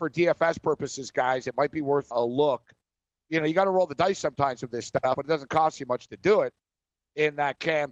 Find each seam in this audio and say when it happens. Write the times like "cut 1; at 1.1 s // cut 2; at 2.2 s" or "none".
cut 1; at 2.1 s